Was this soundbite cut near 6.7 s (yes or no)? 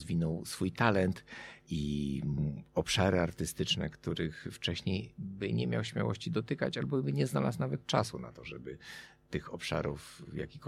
no